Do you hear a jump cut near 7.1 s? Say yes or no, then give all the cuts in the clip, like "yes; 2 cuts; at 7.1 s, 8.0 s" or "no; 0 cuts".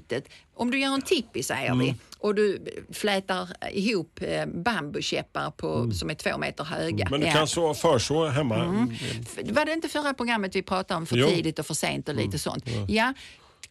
yes; 1 cut; at 7.1 s